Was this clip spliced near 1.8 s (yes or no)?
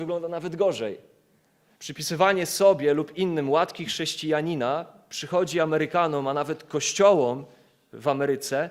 yes